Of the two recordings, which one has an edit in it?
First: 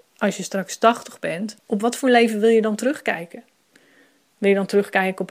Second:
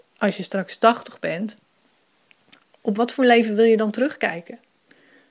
first; 1 cut; at 1.6 s

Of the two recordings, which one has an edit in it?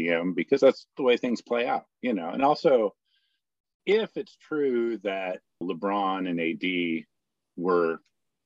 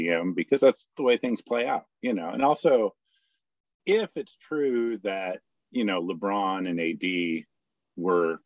first; 1 cut; at 5.6 s

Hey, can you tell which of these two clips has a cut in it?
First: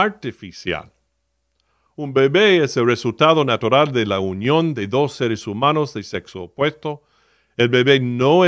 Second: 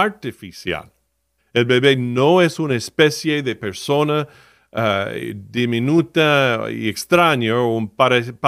second; 1 cut; at 1.4 s

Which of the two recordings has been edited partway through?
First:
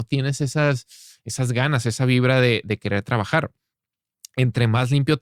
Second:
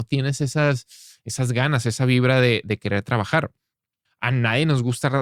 second; 1 cut; at 4.1 s

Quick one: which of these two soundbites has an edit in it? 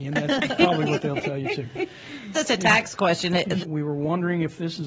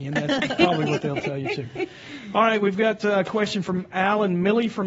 first; 2 cuts; at 2.3 s, 3.6 s

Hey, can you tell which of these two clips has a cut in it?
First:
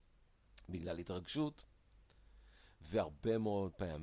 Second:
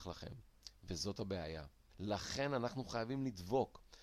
second; 1 cut; at 1.9 s

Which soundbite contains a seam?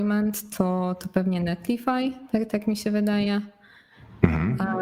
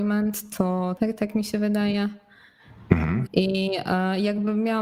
second; 2 cuts; at 1.0 s, 3.3 s

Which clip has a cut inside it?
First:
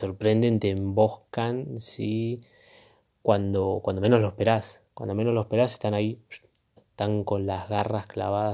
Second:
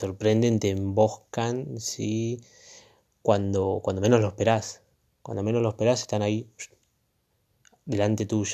first; 2 cuts; at 4.9 s, 6.8 s

